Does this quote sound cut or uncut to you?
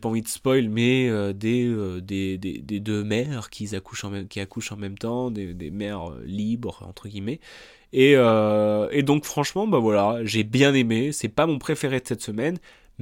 uncut